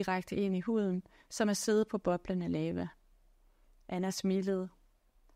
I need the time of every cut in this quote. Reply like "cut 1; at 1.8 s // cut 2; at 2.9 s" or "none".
none